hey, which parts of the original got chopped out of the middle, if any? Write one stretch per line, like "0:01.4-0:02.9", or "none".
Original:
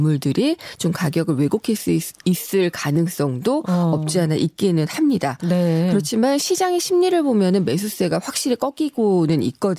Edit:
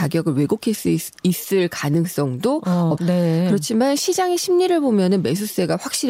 0:04.0-0:05.4